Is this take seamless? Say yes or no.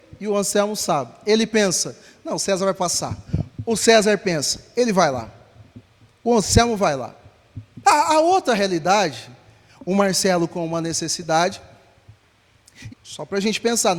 no